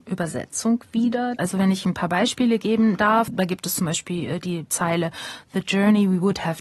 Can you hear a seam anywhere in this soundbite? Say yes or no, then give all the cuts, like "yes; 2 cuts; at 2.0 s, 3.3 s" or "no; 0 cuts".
yes; 2 cuts; at 1.4 s, 3.3 s